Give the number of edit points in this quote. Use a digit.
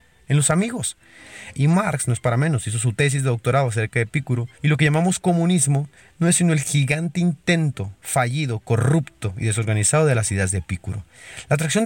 2